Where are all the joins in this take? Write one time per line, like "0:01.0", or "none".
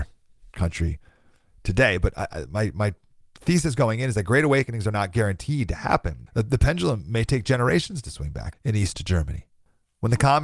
0:06.3
0:08.5